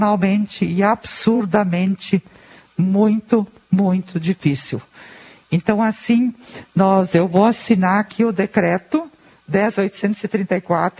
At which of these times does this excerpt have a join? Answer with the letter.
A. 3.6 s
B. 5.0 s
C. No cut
C